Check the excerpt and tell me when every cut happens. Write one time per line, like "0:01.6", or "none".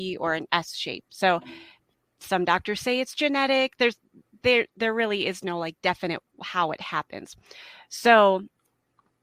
none

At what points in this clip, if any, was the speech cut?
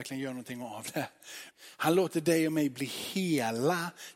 0:01.5

